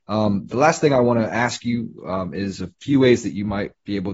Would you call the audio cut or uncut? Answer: uncut